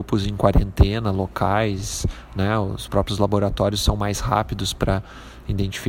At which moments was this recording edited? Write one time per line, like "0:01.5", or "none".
none